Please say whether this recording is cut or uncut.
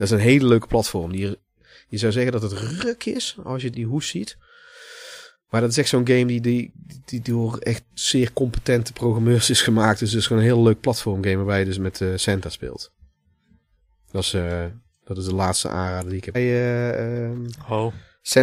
cut